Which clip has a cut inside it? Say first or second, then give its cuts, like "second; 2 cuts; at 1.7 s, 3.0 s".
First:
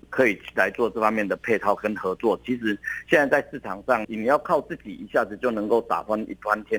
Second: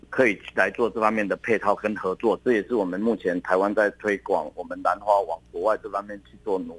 second; 1 cut; at 2.4 s